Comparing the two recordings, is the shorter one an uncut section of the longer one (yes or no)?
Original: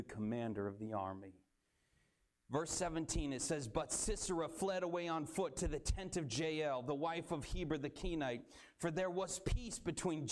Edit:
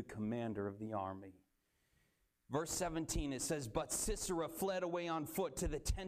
yes